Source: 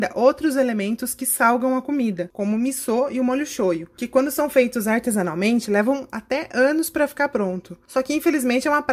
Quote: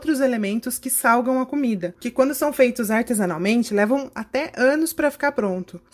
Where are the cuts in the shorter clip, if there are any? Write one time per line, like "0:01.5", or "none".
0:01.9